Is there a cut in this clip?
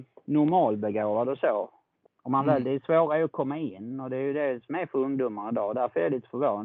yes; 1 cut; at 2.1 s

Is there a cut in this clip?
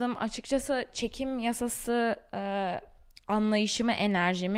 no; 0 cuts

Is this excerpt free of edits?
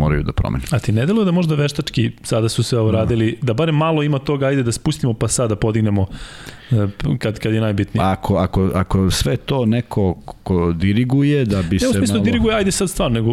yes; 0 cuts

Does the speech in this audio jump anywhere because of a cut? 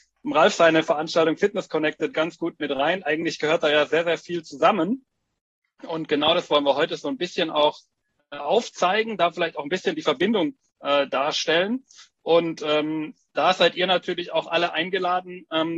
no; 0 cuts

